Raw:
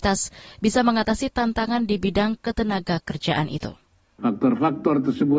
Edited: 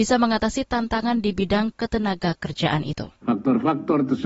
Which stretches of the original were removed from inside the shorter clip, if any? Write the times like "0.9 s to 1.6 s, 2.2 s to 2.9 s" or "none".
3.8 s to 4.1 s